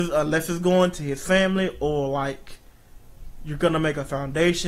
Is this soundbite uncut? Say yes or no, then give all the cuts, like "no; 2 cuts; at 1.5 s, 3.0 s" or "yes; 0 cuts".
yes; 0 cuts